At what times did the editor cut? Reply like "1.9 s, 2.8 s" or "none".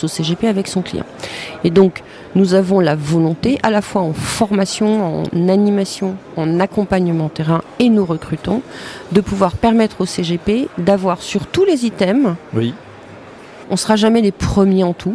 13.6 s